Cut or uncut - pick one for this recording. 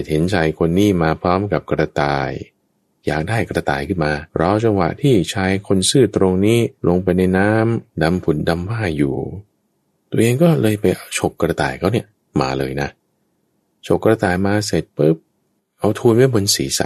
cut